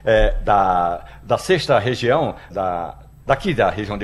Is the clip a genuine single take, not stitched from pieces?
no; 1 cut; at 2.5 s

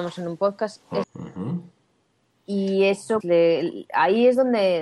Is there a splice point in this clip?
yes; 2 cuts; at 1.0 s, 3.2 s

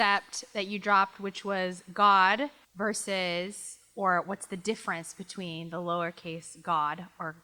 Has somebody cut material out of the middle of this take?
yes; 1 cut; at 2.6 s

